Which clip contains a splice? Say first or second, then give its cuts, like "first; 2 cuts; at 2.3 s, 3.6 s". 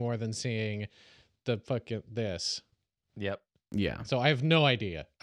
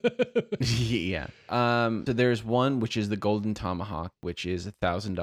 second; 1 cut; at 2.1 s